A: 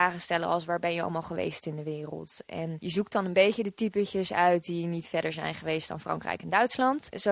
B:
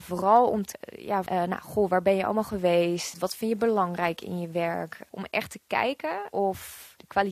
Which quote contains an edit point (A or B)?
B